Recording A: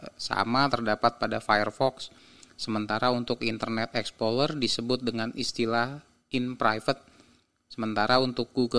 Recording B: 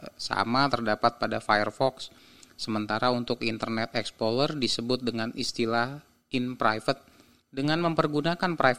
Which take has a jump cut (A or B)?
B